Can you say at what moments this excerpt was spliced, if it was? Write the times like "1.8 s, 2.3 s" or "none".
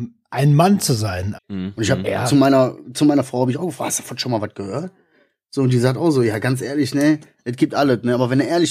1.3 s